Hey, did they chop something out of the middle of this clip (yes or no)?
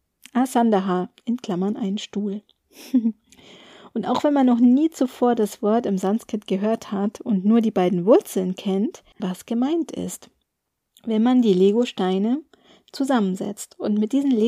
yes